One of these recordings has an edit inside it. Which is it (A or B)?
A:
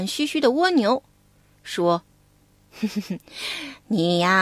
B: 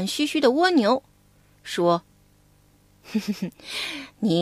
A